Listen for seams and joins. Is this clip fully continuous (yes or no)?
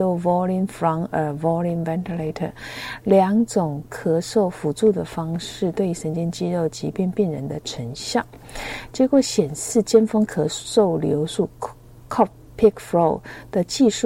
yes